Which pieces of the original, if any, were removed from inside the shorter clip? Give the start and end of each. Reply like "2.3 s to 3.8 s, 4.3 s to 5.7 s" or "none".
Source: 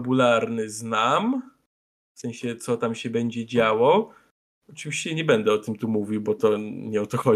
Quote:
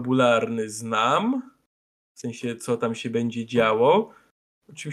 none